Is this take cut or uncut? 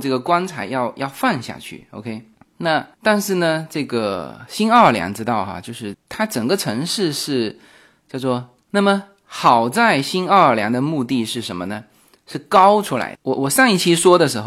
cut